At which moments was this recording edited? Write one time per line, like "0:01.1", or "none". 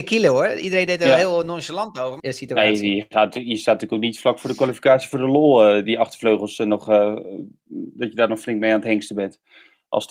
0:02.2